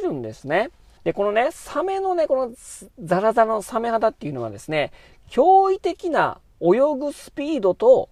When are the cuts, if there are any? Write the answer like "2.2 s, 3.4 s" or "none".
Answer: 1.0 s